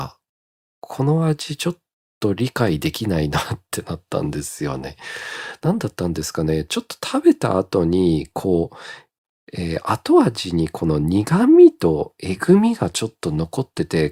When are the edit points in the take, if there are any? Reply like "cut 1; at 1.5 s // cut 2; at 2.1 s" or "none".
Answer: none